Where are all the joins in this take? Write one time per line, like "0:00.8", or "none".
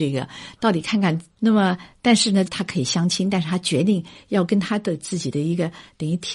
0:01.4
0:02.5